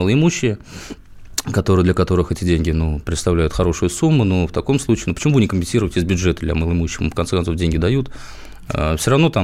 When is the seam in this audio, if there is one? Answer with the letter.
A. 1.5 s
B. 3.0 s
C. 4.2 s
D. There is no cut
D